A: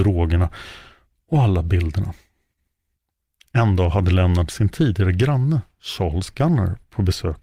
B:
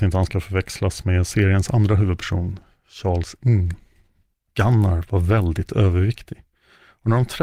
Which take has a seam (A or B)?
B